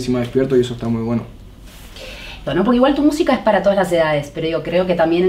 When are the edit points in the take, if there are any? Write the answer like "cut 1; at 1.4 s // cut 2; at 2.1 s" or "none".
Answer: cut 1; at 2.5 s